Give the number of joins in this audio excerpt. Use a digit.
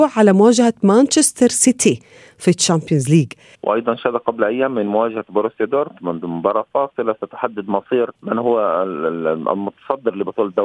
2